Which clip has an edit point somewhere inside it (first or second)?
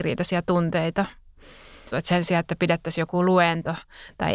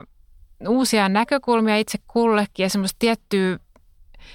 first